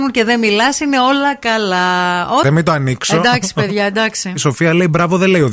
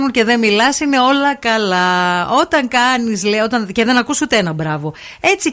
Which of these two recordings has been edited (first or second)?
first